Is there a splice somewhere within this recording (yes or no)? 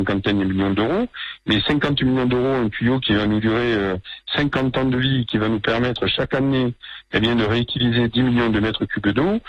no